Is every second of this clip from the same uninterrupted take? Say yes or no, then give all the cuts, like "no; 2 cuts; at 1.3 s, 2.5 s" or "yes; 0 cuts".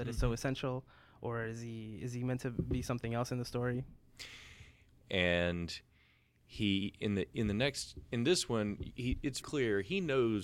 no; 2 cuts; at 5.0 s, 9.4 s